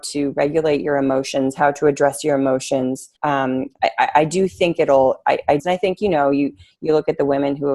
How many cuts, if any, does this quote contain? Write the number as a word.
two